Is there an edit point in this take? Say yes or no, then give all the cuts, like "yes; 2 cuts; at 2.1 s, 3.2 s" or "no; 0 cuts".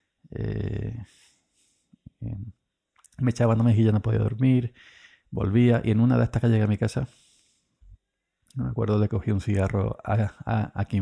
no; 0 cuts